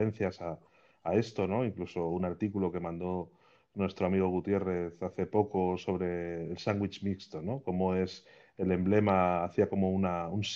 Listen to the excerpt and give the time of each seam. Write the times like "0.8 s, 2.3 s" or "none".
none